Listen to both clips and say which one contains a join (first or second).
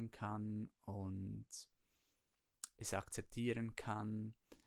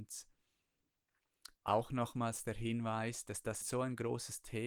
second